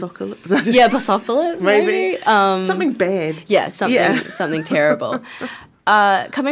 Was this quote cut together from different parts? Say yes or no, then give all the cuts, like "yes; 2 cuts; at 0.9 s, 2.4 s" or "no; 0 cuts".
no; 0 cuts